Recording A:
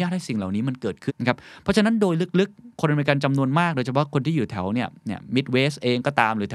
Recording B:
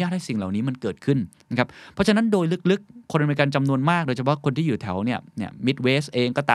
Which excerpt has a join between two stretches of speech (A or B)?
A